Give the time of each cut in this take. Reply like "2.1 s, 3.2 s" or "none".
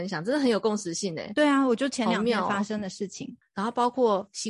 3.4 s